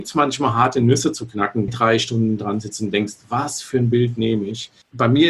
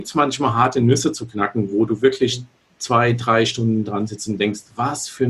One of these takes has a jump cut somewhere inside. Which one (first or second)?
first